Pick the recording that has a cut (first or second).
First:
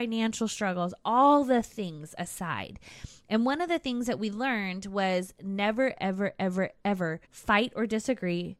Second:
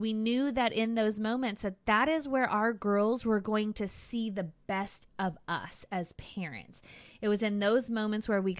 first